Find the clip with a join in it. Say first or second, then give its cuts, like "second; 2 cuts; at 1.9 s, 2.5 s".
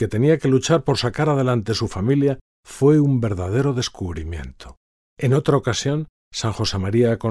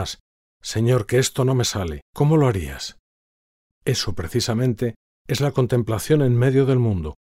second; 1 cut; at 2.1 s